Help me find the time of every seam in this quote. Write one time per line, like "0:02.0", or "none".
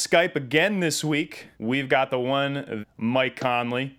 0:01.5
0:02.8